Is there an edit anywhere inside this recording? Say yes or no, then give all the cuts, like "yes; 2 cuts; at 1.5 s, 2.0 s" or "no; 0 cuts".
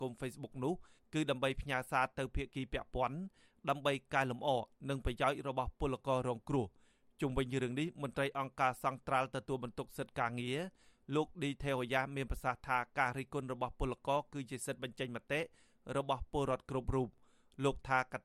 no; 0 cuts